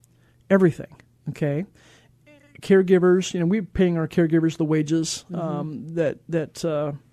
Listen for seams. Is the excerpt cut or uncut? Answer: uncut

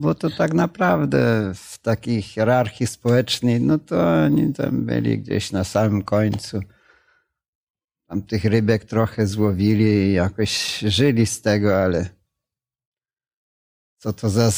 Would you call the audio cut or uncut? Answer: uncut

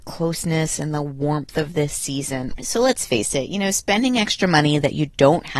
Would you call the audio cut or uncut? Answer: cut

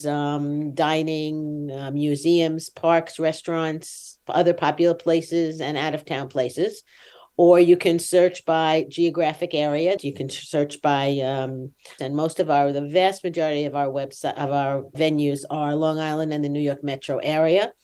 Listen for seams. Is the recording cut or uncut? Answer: cut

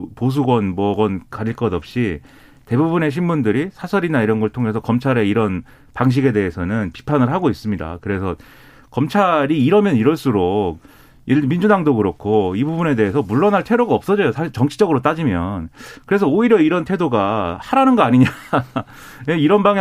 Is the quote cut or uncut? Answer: uncut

